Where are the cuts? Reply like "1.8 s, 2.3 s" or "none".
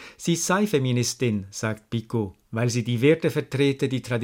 none

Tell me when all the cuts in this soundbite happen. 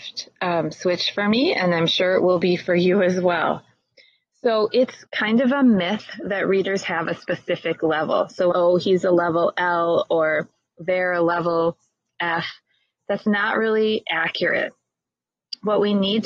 8.5 s

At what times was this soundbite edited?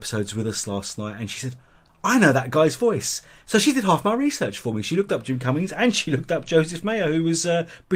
none

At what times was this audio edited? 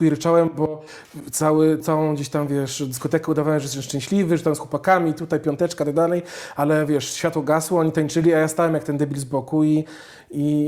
1.8 s

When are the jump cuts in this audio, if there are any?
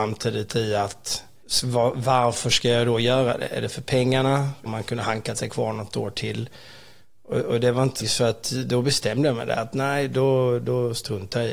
8.0 s

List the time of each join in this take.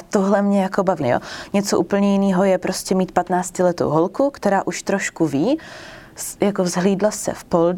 1.0 s

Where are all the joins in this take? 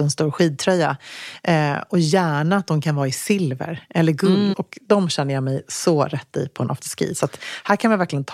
4.5 s

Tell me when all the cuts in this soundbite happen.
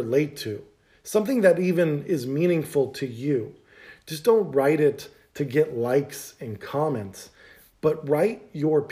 none

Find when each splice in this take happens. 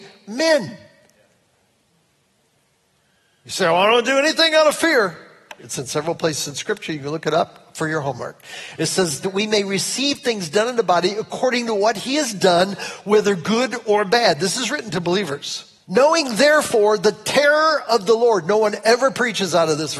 5.6 s, 9.2 s, 15.8 s

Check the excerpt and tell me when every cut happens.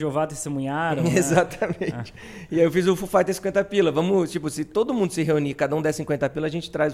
none

